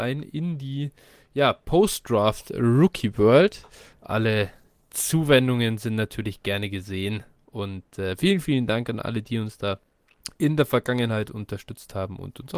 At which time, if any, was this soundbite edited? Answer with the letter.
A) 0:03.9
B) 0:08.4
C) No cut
A